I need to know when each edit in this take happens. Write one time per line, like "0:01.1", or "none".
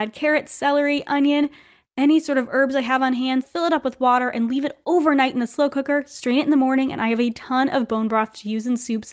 0:03.4